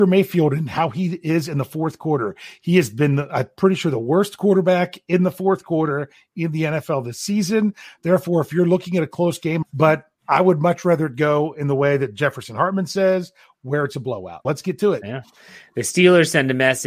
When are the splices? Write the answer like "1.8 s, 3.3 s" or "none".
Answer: 9.6 s, 14.4 s